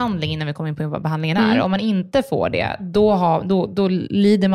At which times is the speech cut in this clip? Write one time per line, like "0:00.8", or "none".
none